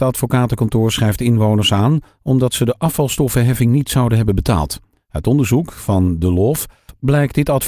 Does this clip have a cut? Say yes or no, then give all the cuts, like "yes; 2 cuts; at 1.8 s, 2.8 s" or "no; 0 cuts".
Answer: no; 0 cuts